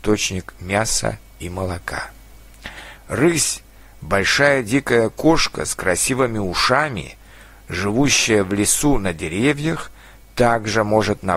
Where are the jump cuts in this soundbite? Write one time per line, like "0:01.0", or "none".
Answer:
0:03.0